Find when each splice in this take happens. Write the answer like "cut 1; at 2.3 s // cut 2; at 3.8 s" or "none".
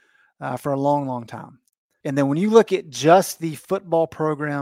cut 1; at 2.0 s